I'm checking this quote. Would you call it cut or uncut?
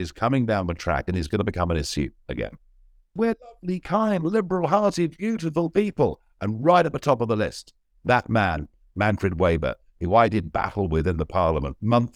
cut